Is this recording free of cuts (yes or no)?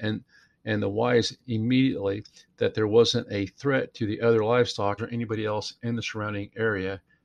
no